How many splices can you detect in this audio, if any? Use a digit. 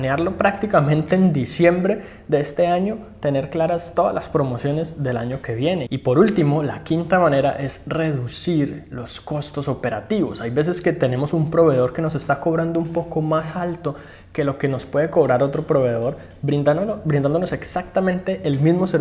1